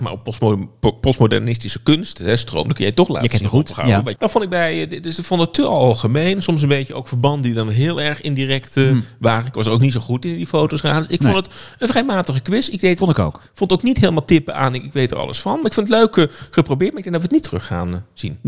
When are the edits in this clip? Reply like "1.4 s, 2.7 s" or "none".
4.2 s